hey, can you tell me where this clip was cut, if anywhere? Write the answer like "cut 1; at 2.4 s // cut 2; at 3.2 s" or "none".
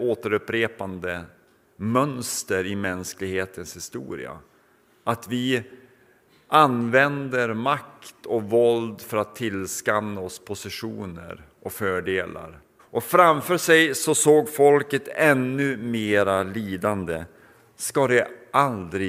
cut 1; at 12.8 s